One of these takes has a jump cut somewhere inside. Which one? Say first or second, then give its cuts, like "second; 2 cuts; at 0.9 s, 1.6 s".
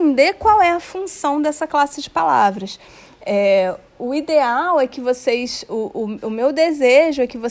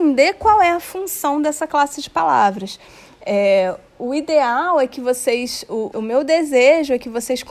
second; 1 cut; at 5.9 s